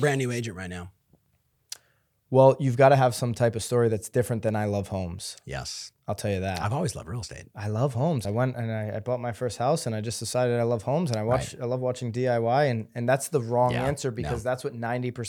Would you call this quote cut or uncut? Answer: uncut